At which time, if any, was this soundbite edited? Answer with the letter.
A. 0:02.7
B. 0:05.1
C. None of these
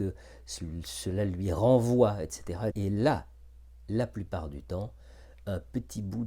A